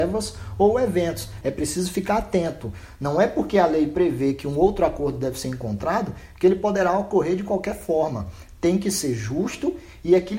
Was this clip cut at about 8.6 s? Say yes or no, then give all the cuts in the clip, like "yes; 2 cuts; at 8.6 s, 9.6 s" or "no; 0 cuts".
no; 1 cut; at 1.4 s